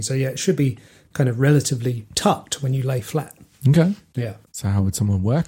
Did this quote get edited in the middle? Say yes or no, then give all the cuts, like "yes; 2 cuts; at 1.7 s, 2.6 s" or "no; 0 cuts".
yes; 1 cut; at 4.4 s